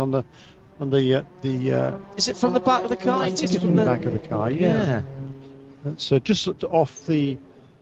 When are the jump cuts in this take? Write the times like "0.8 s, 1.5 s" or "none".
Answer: 6.6 s

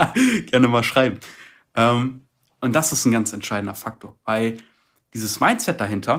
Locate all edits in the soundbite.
none

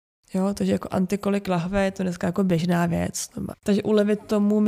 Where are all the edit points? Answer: 3.5 s

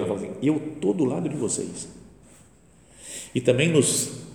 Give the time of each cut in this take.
none

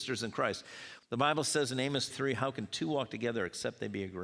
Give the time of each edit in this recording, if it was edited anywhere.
1.0 s, 2.1 s

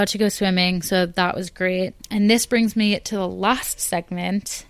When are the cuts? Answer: 2.0 s

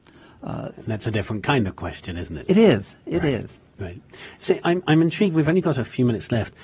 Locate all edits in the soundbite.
none

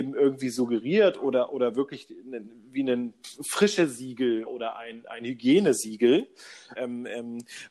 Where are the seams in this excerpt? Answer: 4.5 s, 6.7 s

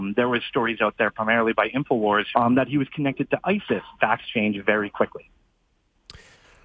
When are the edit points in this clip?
2.3 s, 4.0 s

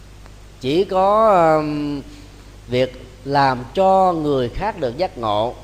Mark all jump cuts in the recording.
none

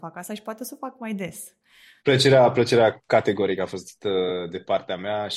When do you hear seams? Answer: 2.0 s

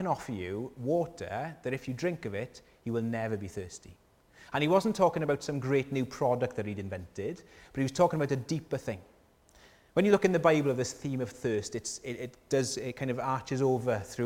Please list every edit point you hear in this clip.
none

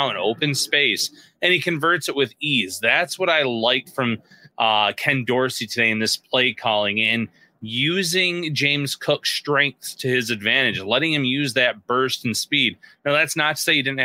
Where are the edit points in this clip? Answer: none

